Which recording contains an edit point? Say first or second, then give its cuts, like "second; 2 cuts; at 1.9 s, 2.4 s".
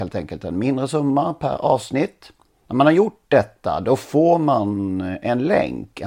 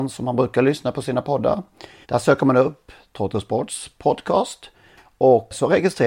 second; 1 cut; at 2.0 s